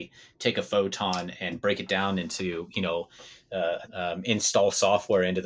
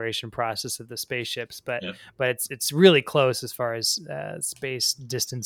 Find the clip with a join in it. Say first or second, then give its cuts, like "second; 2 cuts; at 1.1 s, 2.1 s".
first; 1 cut; at 3.9 s